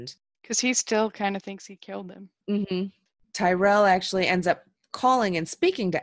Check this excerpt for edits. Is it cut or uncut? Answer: uncut